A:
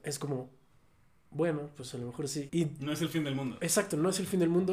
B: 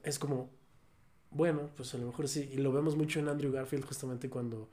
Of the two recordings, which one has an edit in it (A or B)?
A